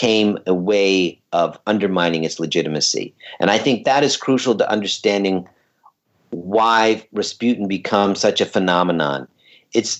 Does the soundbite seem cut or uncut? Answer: uncut